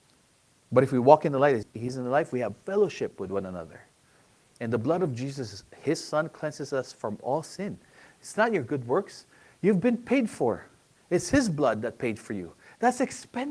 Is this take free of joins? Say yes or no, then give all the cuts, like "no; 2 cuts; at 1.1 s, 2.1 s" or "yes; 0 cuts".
no; 1 cut; at 1.6 s